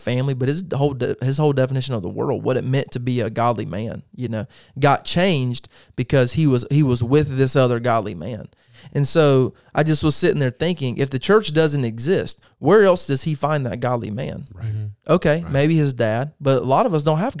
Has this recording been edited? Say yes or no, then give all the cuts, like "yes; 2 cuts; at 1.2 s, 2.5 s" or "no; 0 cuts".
no; 0 cuts